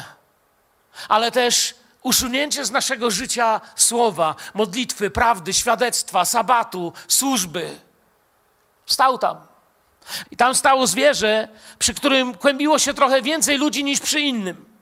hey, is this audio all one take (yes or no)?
no